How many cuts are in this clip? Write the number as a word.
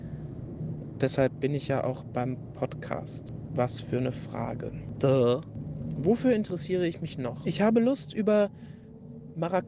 one